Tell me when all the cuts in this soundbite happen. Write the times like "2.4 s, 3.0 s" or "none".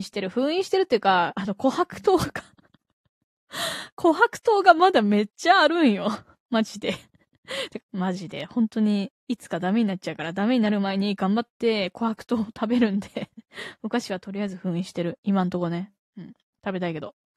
7.8 s